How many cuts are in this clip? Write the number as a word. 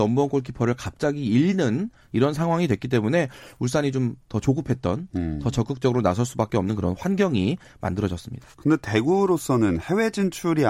one